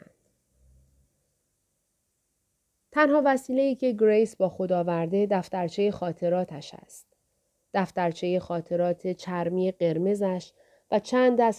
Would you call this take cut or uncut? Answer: uncut